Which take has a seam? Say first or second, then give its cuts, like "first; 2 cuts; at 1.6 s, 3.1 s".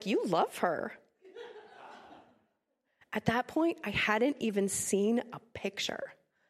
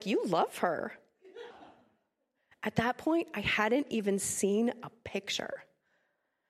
second; 1 cut; at 1.5 s